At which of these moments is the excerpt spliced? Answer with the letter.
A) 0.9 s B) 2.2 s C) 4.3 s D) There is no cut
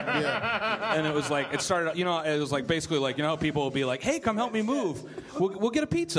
D